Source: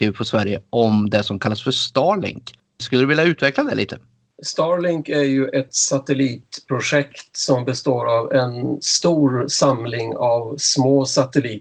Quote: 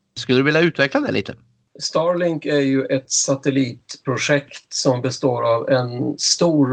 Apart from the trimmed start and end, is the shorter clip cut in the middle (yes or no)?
no